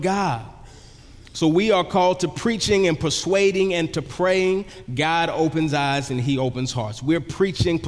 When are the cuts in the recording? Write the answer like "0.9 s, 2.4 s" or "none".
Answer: none